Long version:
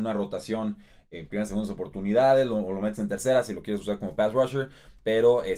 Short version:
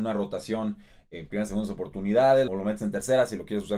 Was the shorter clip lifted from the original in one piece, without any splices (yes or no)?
no